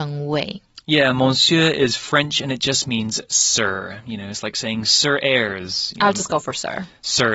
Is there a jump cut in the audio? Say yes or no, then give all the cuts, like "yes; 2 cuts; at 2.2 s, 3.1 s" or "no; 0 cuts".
no; 0 cuts